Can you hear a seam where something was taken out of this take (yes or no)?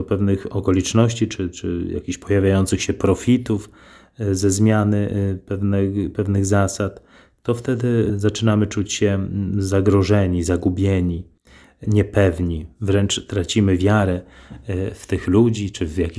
no